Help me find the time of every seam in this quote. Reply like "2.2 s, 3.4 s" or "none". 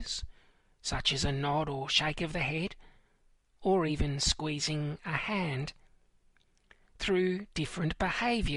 none

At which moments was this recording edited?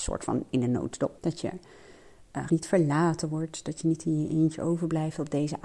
1.2 s, 2.5 s

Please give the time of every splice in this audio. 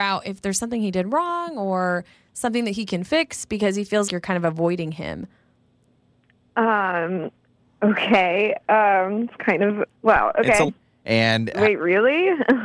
4.1 s, 10.7 s

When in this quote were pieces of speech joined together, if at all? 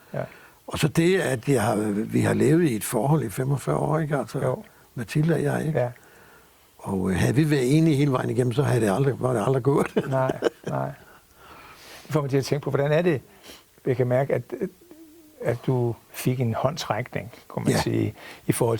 none

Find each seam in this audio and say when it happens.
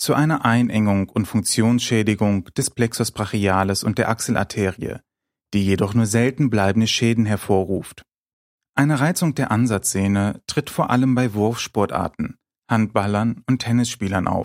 none

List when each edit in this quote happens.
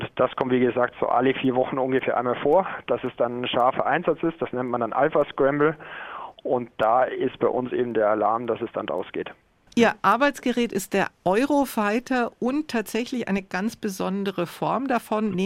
none

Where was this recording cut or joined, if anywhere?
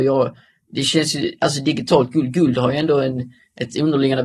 none

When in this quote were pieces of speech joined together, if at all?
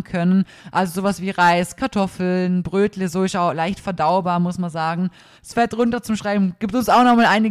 5.3 s

